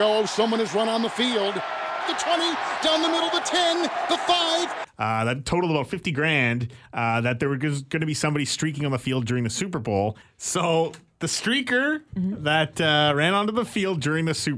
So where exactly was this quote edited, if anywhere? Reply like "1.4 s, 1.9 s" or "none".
2.0 s, 4.8 s, 10.2 s